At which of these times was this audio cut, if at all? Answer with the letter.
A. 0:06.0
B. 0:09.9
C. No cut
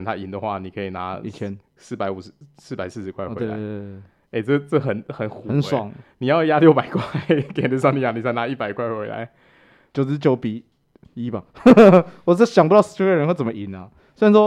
B